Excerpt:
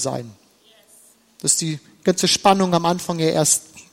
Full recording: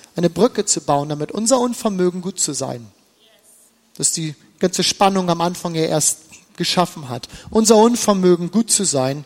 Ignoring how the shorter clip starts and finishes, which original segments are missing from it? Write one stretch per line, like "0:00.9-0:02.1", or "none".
none